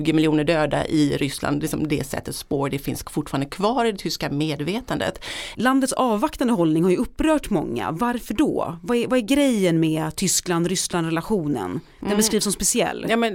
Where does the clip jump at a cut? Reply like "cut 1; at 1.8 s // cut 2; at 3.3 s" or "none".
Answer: cut 1; at 5.5 s

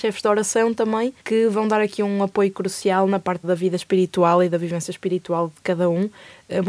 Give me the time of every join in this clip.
cut 1; at 1.2 s // cut 2; at 3.4 s

